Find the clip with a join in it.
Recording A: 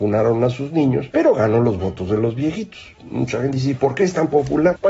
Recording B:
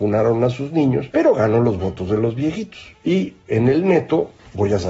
A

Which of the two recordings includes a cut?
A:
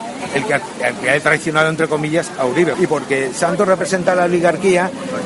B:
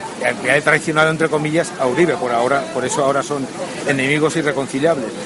A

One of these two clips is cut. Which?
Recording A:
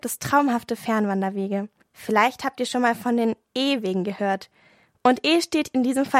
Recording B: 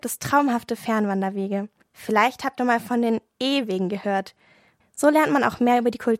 B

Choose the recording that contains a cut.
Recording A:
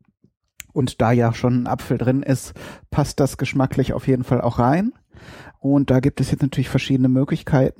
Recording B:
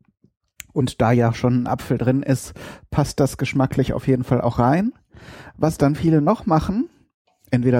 A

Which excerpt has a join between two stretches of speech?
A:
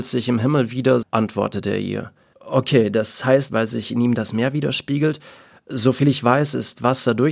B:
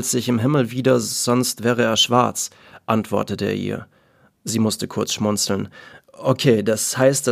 A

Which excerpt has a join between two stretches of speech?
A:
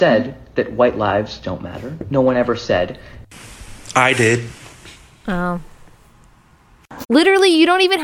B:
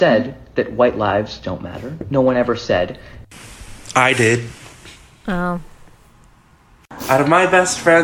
A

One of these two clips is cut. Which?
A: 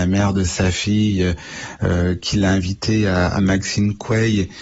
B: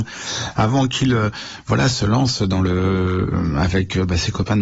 A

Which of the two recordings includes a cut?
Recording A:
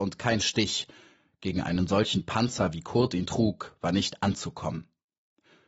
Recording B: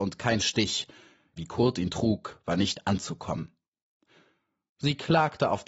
B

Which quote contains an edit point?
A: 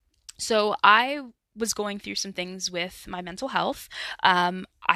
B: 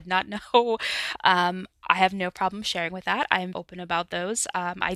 B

